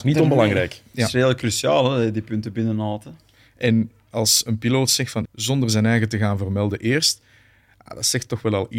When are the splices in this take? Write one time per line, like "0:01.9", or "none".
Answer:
0:05.2